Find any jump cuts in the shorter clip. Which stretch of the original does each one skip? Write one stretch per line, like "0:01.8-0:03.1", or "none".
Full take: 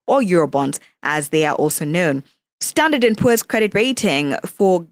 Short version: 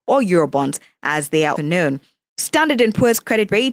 0:01.6-0:01.8